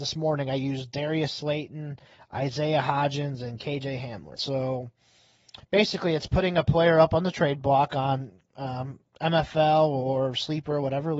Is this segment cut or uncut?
cut